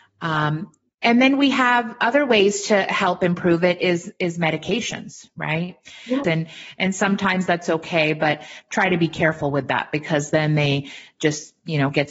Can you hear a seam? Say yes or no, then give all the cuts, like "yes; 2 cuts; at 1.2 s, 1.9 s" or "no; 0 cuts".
yes; 1 cut; at 6.2 s